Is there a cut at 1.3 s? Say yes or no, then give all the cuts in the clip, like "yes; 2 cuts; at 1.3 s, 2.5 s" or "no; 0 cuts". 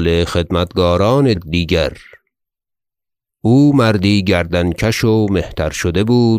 yes; 1 cut; at 1.3 s